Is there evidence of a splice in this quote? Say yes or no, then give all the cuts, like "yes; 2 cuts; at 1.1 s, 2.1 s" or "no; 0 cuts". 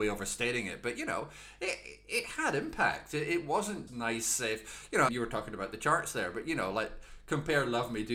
yes; 2 cuts; at 3.9 s, 5.1 s